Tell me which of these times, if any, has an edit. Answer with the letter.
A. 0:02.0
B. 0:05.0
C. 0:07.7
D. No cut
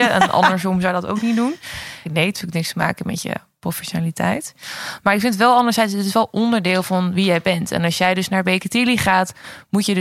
A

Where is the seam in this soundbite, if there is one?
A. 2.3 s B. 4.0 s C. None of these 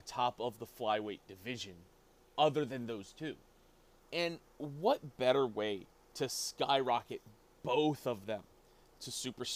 B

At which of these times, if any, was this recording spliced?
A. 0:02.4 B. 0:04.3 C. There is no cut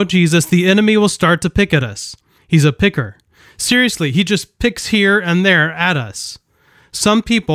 A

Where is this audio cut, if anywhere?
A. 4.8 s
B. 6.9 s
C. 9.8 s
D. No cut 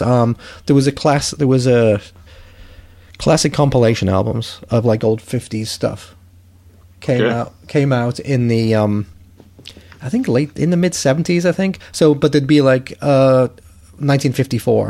D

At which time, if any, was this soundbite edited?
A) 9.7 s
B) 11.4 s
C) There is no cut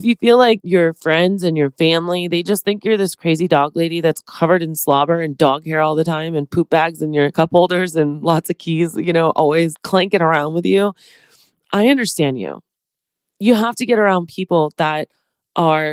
A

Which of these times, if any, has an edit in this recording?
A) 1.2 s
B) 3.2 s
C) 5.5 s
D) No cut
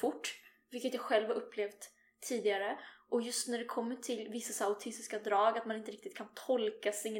D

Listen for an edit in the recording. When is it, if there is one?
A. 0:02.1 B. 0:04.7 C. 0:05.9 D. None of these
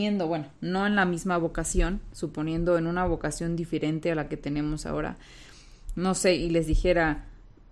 D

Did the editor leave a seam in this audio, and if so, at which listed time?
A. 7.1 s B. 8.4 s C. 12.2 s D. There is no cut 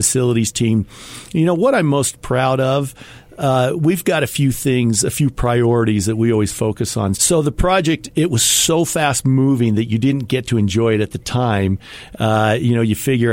A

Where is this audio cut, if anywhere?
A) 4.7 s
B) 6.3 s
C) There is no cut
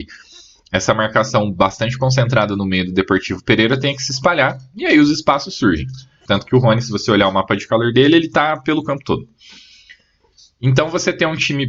B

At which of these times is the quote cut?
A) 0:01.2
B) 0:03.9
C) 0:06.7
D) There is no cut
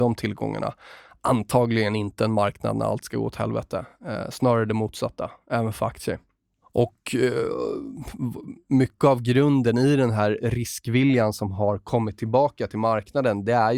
D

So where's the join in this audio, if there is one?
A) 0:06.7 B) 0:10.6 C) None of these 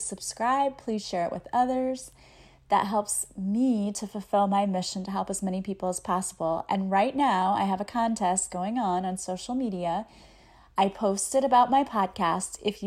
C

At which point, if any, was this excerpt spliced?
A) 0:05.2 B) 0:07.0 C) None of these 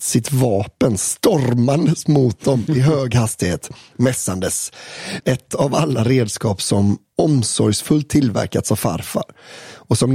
A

